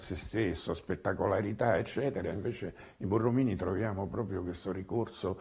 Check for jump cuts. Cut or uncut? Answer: uncut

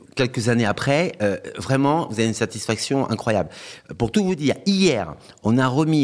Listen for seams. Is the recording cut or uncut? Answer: uncut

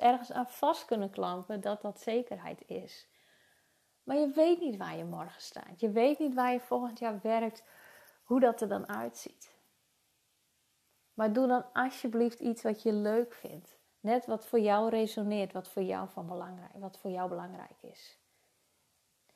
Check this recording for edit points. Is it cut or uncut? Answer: cut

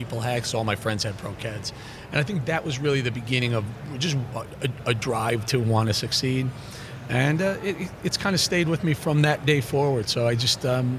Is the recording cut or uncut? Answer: uncut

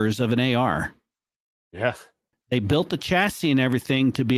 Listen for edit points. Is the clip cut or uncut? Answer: cut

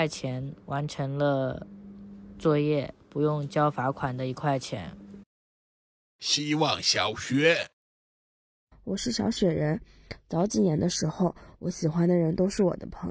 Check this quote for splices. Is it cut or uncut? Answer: uncut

